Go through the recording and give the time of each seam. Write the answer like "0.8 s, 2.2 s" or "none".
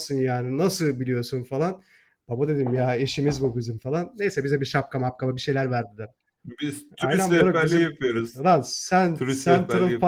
none